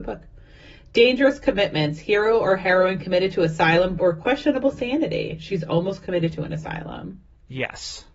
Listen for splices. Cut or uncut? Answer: cut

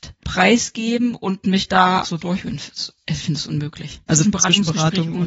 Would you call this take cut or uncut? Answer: cut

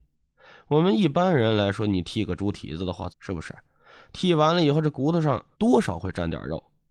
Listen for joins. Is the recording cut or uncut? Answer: cut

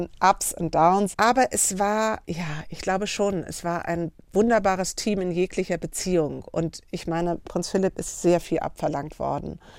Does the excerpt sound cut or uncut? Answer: cut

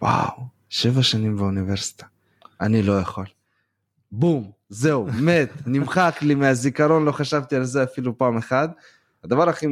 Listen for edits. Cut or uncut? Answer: uncut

